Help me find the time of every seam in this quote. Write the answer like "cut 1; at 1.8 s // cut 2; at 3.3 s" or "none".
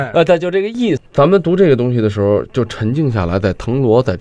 cut 1; at 1.0 s